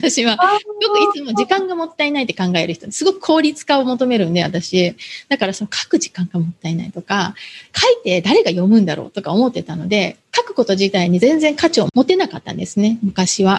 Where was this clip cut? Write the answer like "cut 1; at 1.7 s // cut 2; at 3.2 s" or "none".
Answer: none